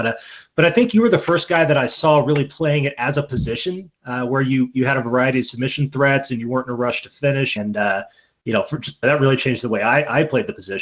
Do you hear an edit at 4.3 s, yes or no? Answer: no